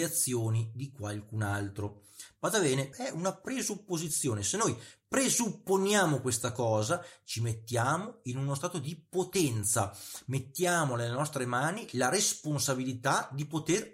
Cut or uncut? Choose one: cut